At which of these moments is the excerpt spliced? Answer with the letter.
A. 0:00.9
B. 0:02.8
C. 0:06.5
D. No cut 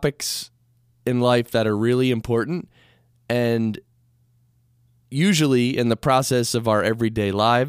D